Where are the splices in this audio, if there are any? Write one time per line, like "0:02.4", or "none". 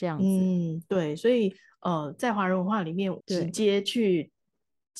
0:03.2